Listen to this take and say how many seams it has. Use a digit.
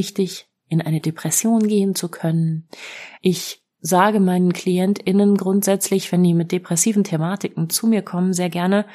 1